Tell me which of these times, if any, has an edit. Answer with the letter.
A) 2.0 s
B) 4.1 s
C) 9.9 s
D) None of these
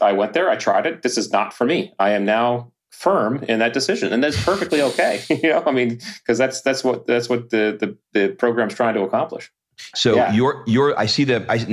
C